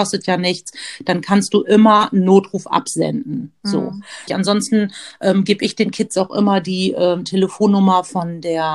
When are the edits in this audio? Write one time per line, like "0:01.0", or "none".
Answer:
0:04.3